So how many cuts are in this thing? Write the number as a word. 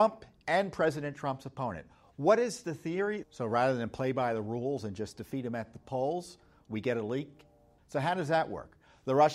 two